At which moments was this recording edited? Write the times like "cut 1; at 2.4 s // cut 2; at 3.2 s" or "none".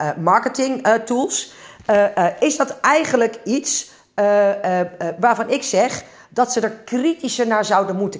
none